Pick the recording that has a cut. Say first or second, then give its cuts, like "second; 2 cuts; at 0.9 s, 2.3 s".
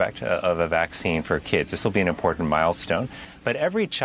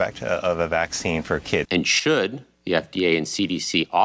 second; 1 cut; at 1.6 s